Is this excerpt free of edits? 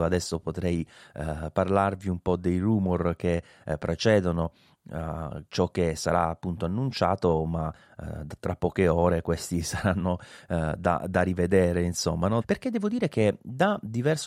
no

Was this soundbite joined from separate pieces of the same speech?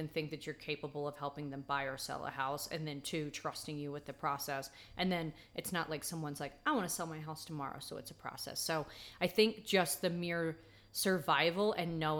no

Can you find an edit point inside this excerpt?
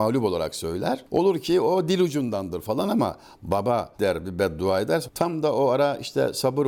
yes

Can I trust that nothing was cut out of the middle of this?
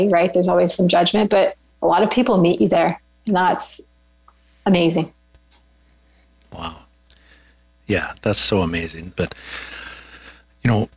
no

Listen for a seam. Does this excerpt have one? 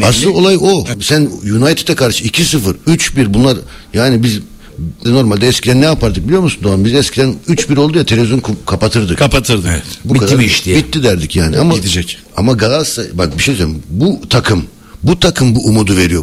yes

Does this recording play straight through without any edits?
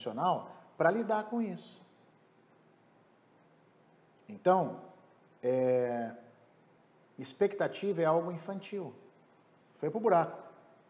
no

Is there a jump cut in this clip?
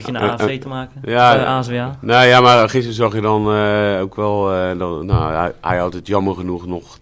no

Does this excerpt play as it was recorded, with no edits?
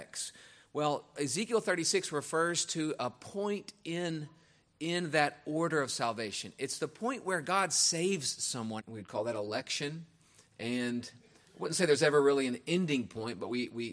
no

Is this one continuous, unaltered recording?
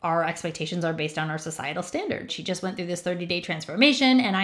no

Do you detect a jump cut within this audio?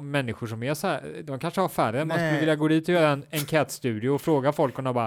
no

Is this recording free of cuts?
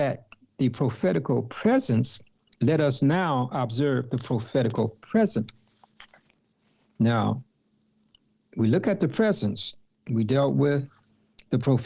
yes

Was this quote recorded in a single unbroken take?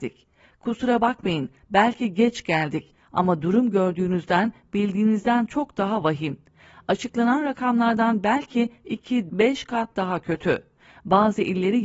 no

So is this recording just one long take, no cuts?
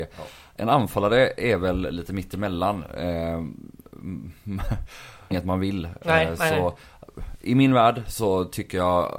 no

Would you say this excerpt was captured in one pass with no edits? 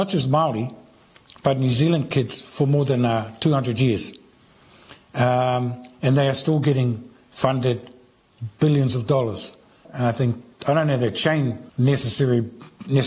no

